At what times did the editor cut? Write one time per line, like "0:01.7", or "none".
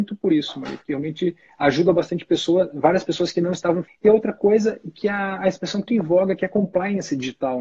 0:03.9
0:05.9

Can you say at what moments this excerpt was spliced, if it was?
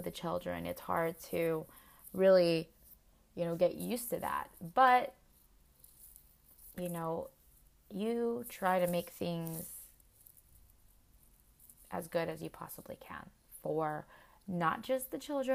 none

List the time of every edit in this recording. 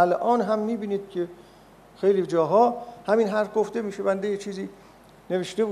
none

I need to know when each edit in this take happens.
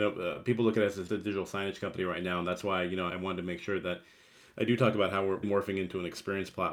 0:01.1
0:03.1
0:05.4

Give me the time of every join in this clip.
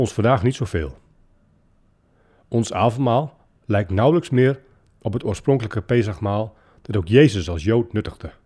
none

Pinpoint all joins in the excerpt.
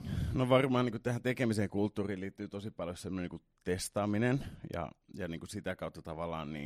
none

